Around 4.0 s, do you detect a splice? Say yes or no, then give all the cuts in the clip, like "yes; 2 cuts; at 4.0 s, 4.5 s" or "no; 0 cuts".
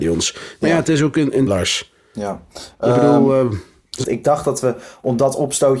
yes; 2 cuts; at 1.5 s, 4.0 s